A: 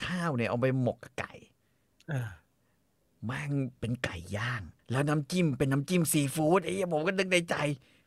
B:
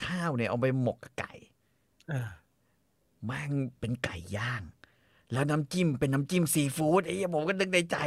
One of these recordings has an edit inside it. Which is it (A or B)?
A